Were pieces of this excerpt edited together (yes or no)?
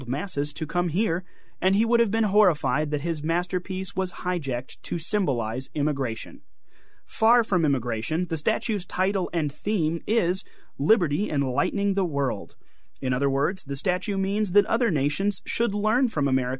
no